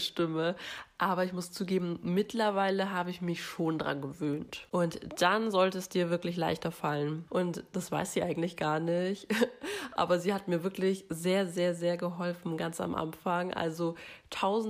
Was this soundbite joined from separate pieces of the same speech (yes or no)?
yes